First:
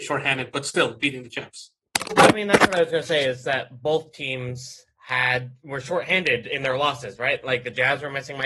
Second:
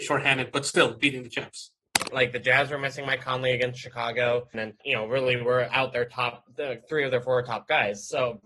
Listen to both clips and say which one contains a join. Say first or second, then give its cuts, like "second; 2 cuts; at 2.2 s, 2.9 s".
second; 2 cuts; at 2.1 s, 4.5 s